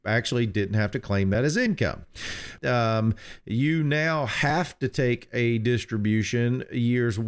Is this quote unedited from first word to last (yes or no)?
no